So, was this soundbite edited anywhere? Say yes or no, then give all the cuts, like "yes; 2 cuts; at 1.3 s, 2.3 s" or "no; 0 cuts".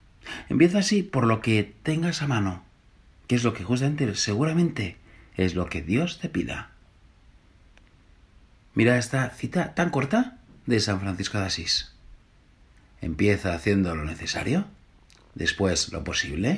no; 0 cuts